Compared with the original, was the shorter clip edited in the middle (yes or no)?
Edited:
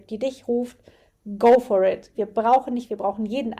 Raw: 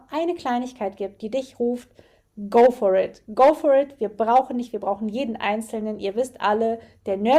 yes